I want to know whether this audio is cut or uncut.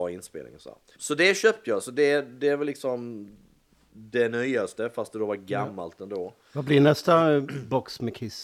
cut